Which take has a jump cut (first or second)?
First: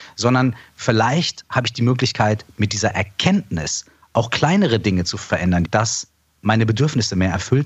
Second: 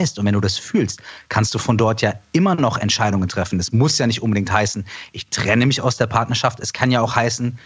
first